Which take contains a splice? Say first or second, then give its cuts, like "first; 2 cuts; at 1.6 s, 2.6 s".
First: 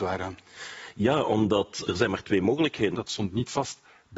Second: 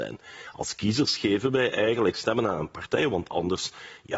first; 2 cuts; at 1.9 s, 2.9 s